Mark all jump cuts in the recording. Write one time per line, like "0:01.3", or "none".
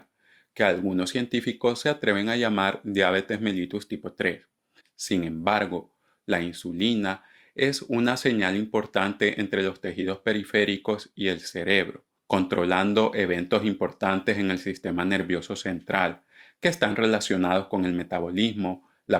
0:04.8